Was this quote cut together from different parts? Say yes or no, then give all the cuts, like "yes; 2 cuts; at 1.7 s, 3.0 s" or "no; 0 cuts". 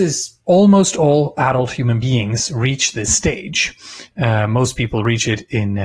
no; 0 cuts